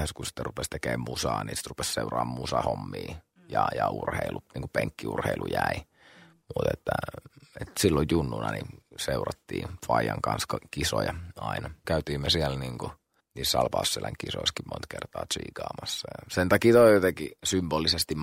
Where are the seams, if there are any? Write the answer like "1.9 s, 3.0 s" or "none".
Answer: none